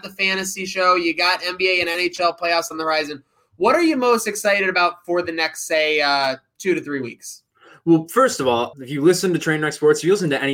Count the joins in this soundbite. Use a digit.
1